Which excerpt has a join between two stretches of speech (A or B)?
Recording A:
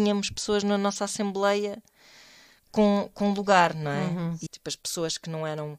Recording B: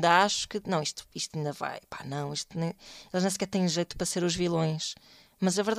A